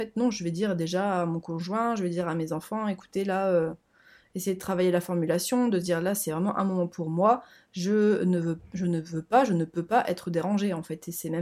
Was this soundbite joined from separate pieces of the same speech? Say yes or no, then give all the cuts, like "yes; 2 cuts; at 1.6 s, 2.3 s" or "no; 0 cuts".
no; 0 cuts